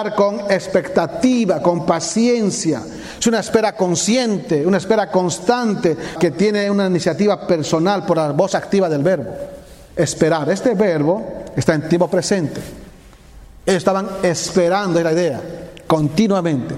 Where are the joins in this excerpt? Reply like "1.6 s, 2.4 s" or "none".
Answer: 6.2 s, 9.9 s